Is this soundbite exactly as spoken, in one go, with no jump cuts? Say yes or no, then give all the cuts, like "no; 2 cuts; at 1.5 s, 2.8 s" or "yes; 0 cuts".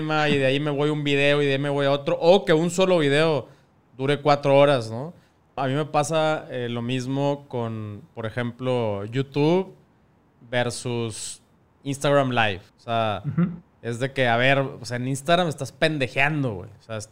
no; 2 cuts; at 5.6 s, 12.7 s